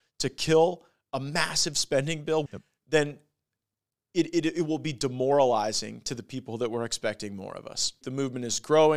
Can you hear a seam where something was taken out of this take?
yes; 2 cuts; at 2.5 s, 8.0 s

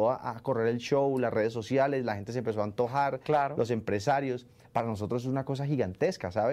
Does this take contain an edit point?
yes; 1 cut; at 4.6 s

